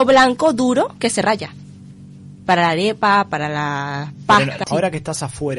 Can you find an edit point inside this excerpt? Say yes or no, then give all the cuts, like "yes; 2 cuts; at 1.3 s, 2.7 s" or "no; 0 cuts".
yes; 1 cut; at 4.6 s